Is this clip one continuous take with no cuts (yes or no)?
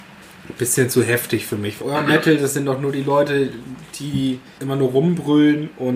no